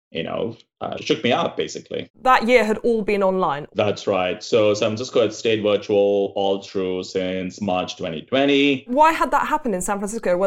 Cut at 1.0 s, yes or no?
yes